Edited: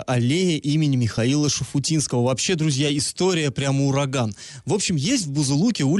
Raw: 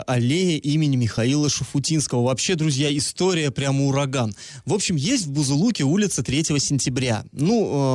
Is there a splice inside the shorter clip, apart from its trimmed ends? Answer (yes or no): no